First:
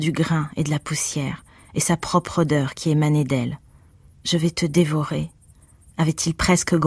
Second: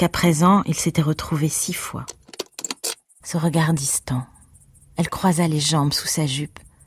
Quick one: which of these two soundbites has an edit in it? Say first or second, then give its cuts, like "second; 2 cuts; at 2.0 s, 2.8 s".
second; 1 cut; at 3.2 s